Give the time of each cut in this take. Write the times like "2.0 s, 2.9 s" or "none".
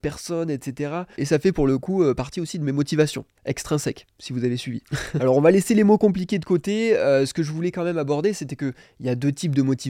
1.1 s, 3.4 s